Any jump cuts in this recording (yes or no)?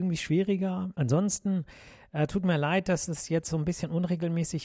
yes